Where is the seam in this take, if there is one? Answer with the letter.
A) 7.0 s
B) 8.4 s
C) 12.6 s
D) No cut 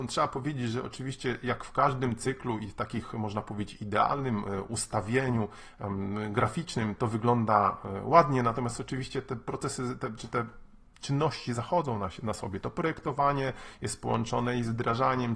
A